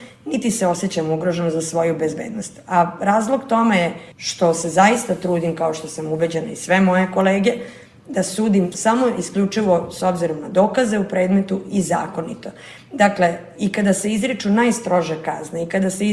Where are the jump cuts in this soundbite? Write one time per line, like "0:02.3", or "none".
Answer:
none